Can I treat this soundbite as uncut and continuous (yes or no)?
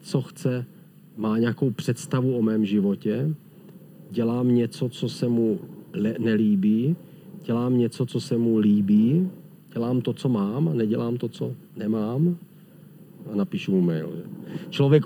no